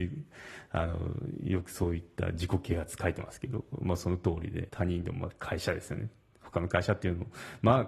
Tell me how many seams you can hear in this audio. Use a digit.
1